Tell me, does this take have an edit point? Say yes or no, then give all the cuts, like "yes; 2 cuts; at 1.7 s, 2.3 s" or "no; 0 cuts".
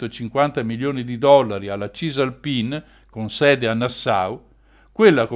no; 0 cuts